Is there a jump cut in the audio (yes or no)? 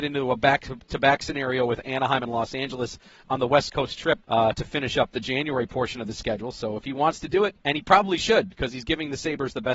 yes